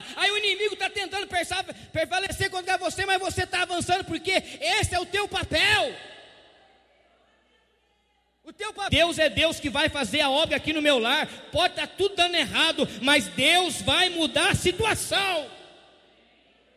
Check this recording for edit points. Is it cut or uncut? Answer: cut